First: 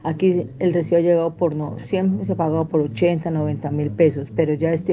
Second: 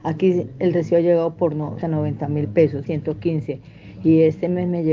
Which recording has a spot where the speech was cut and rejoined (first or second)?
second